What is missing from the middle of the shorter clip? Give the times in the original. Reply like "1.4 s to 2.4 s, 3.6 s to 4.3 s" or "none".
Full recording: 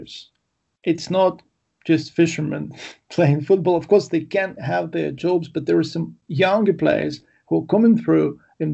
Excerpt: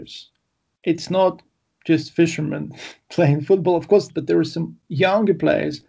4.1 s to 5.5 s

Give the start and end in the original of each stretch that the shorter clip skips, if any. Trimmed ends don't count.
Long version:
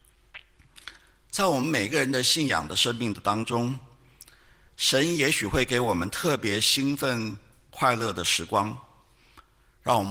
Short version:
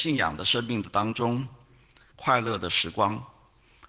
4.4 s to 7.6 s

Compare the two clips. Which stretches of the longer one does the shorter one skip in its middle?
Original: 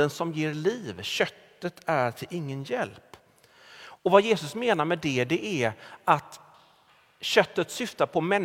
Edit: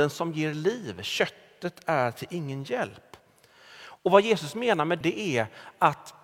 5.0 s to 5.3 s

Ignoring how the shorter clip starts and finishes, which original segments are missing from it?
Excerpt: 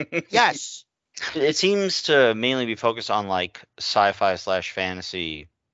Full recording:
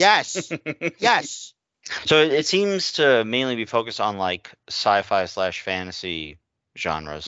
2.0 s to 2.2 s

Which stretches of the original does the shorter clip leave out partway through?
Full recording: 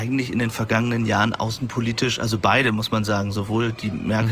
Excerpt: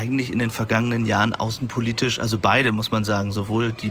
none

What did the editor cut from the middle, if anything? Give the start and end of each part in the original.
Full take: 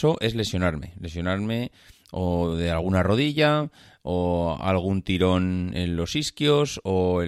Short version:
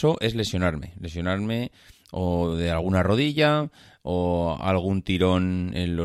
none

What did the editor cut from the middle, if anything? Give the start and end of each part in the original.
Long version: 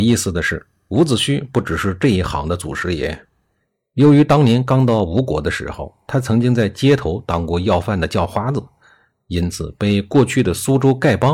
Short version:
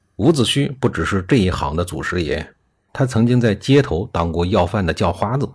3.6 s to 6.0 s

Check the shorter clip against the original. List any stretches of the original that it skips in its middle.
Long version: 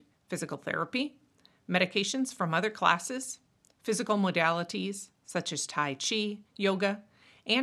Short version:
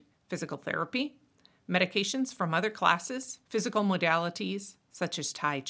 3.4 s to 3.8 s

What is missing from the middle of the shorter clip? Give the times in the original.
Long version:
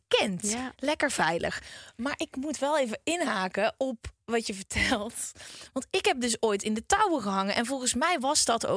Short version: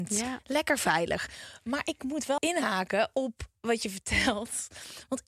2.7 s to 3.0 s

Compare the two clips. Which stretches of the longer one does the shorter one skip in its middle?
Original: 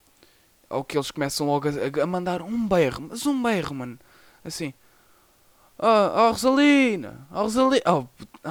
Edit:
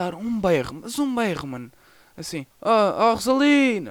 4.8 s to 5.7 s

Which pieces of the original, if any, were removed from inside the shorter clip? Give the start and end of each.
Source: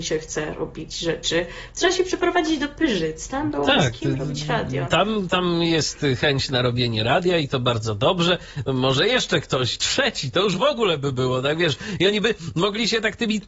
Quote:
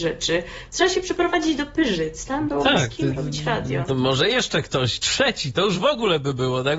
4.9 s to 8.6 s

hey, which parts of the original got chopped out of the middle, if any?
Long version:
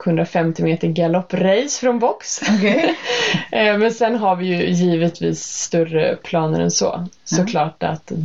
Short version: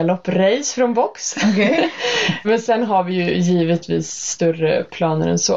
3.5 s to 3.8 s

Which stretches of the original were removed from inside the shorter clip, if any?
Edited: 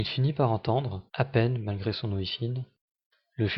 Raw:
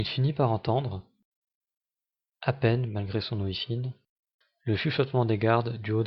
1.1 s to 2.4 s

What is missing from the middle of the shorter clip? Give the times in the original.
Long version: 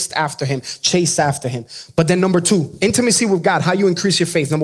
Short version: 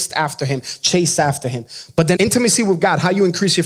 2.2 s to 2.8 s

